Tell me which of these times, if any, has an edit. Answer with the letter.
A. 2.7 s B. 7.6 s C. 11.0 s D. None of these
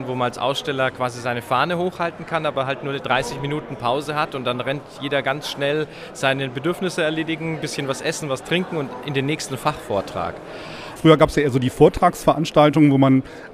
C